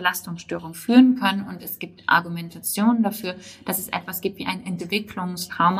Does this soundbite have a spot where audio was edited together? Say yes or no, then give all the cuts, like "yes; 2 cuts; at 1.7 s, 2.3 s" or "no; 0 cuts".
no; 0 cuts